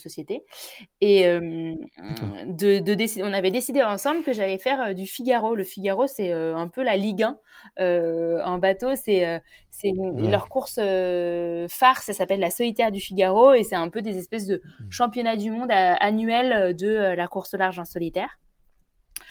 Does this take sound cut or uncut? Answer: uncut